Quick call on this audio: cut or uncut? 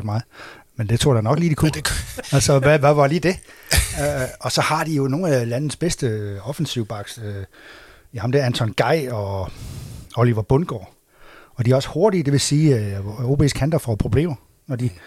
uncut